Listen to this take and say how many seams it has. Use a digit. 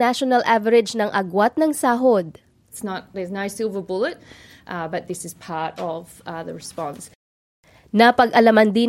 1